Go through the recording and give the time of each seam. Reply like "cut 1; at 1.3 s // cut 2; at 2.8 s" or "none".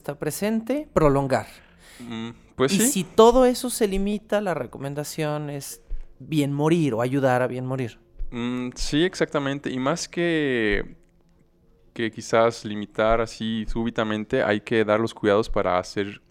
none